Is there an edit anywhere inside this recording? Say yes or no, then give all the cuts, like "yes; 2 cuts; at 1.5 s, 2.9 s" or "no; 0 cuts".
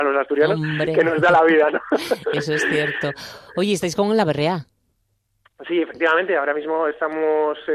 no; 0 cuts